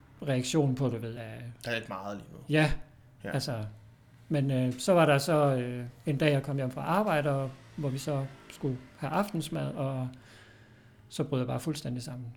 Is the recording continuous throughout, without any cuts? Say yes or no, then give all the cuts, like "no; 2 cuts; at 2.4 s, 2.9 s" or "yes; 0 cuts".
yes; 0 cuts